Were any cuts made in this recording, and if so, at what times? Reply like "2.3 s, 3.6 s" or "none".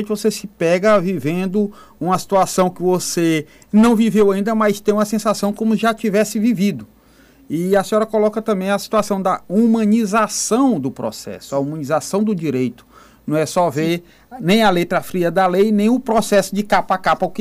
none

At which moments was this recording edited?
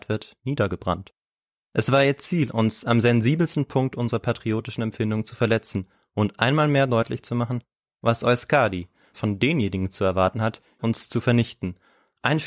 9.1 s, 10.8 s

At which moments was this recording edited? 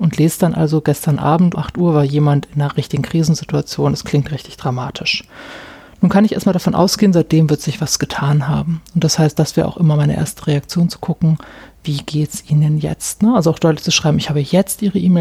1.5 s

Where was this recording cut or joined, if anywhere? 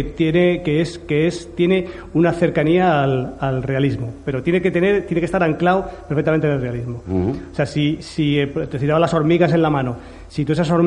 none

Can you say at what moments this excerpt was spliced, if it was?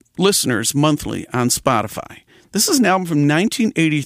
none

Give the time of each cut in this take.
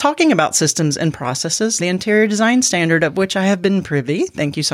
1.8 s

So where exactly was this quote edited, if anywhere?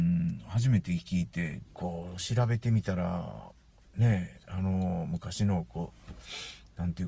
1.7 s

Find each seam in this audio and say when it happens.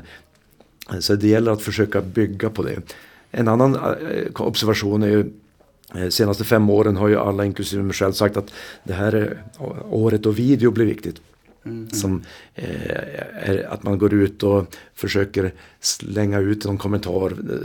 11.9 s

